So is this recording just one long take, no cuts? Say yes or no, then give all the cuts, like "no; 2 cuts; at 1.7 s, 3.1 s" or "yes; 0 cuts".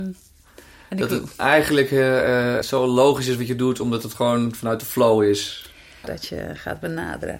no; 2 cuts; at 2.6 s, 6.0 s